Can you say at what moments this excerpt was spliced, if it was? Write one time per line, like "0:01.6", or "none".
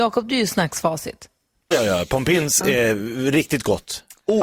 0:01.7